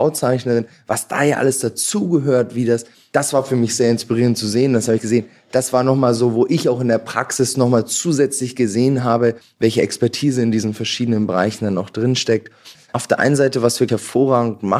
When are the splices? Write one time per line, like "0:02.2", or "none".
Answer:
0:12.8
0:13.9